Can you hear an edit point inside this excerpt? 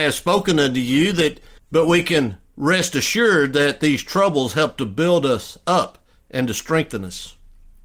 yes; 1 cut; at 1.6 s

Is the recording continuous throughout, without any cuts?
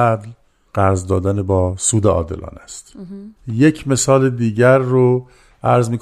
no; 1 cut; at 3.4 s

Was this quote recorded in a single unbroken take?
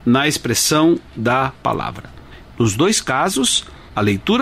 no; 1 cut; at 2.4 s

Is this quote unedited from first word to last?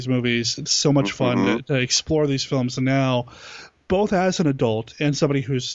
yes; 0 cuts

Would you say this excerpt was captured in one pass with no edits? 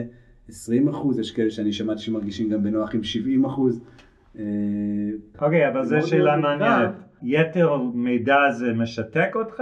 no; 2 cuts; at 5.3 s, 7.2 s

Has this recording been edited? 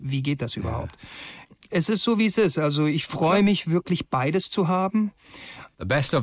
no; 0 cuts

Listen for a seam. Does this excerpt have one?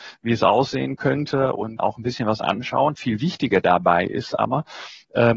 yes; 1 cut; at 1.8 s

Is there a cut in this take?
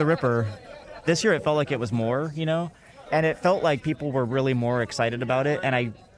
yes; 1 cut; at 3.1 s

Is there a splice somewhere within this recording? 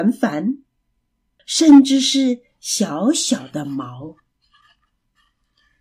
yes; 1 cut; at 1.4 s

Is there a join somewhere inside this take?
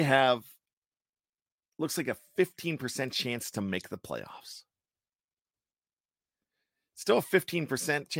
no; 0 cuts

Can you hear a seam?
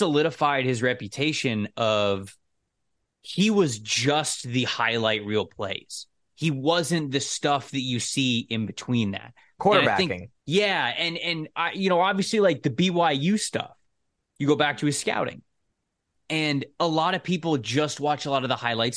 yes; 1 cut; at 10.4 s

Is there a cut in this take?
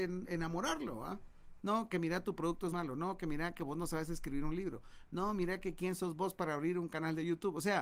yes; 2 cuts; at 1.6 s, 2.7 s

